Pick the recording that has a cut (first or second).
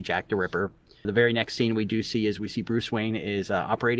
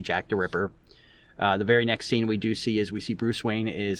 first